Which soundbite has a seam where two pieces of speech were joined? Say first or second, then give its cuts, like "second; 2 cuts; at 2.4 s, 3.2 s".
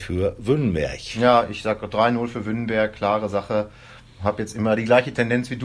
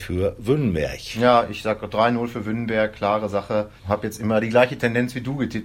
second; 1 cut; at 3.8 s